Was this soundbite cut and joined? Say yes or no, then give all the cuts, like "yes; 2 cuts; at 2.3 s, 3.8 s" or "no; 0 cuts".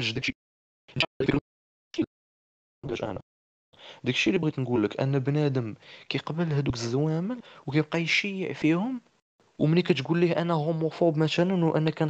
yes; 1 cut; at 1.1 s